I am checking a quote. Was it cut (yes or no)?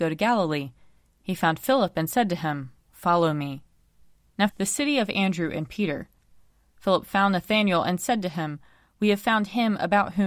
yes